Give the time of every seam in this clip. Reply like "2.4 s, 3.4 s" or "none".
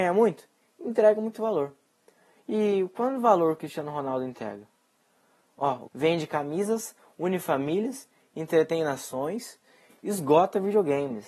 5.9 s